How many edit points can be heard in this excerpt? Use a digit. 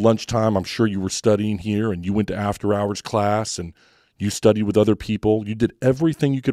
0